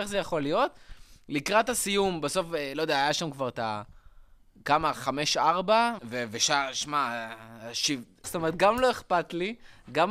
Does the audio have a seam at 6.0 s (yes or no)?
yes